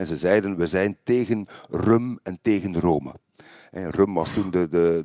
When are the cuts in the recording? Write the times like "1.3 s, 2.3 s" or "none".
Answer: none